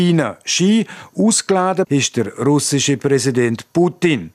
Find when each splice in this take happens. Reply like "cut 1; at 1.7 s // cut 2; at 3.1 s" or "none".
cut 1; at 1.9 s